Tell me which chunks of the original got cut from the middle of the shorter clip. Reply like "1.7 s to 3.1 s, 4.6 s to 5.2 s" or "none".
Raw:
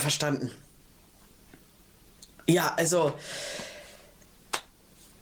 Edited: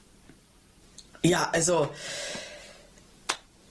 none